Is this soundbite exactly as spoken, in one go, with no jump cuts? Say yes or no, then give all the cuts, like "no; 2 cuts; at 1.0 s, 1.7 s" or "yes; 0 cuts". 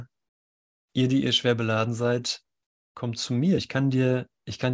no; 1 cut; at 3.6 s